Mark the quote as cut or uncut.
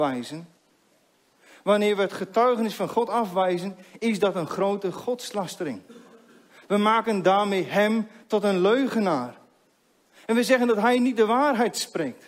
uncut